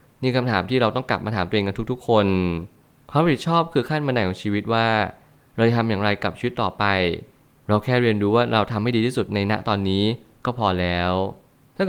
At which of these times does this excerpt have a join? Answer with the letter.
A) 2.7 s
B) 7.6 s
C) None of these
C